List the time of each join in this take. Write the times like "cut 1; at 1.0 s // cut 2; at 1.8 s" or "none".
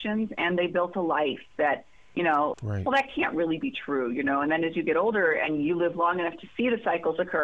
cut 1; at 2.5 s